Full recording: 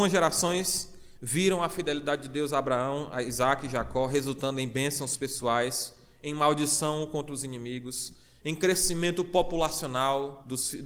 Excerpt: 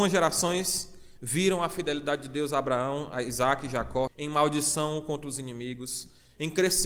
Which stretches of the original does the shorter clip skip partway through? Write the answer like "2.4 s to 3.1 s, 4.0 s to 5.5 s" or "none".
4.1 s to 6.1 s